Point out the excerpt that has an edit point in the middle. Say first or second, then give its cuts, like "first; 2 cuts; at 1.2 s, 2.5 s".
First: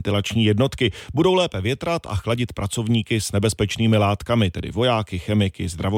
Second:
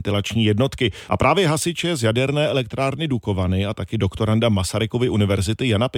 second; 1 cut; at 1.1 s